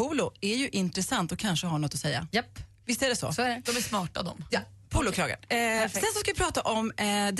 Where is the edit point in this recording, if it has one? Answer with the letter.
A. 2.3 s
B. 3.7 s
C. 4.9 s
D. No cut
B